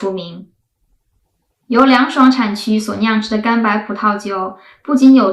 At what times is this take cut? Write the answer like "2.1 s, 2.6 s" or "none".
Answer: none